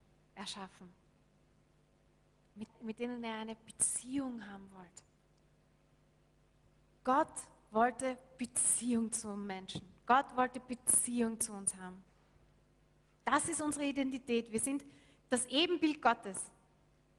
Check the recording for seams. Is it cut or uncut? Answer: cut